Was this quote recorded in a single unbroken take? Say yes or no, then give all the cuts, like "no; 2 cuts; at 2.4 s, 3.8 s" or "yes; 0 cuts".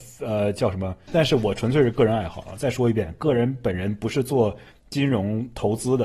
no; 1 cut; at 1.1 s